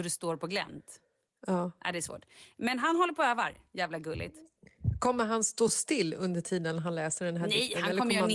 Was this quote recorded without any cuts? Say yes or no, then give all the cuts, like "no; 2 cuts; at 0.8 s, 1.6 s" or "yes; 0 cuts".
yes; 0 cuts